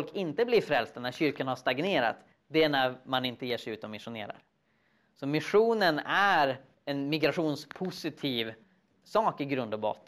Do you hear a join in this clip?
no; 0 cuts

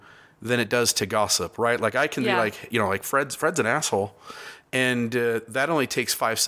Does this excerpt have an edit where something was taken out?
no; 0 cuts

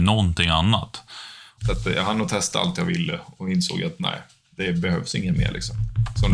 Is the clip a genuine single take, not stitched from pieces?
no; 1 cut; at 1.6 s

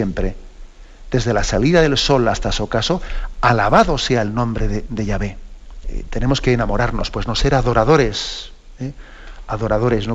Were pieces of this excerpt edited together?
yes; 1 cut; at 5.8 s

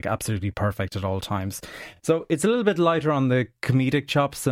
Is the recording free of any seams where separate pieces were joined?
yes; 0 cuts

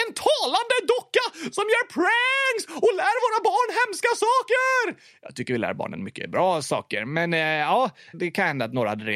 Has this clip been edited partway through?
yes; 1 cut; at 8.1 s

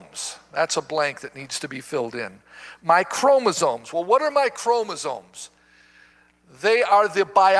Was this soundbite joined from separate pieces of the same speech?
no; 0 cuts

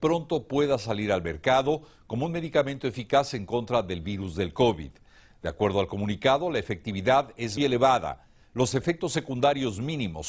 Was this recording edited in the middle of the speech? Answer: yes; 1 cut; at 7.6 s

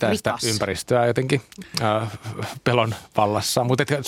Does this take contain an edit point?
no; 0 cuts

